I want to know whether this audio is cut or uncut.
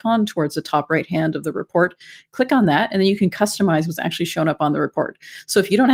uncut